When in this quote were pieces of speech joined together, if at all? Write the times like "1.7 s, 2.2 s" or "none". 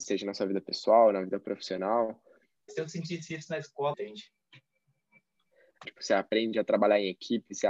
2.7 s, 3.9 s, 5.8 s